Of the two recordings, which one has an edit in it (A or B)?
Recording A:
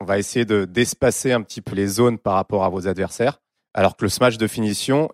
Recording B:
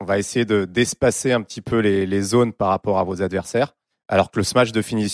A